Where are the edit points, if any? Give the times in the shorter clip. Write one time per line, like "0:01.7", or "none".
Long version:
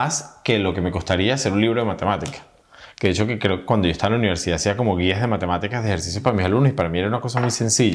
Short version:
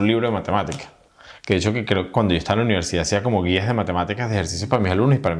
none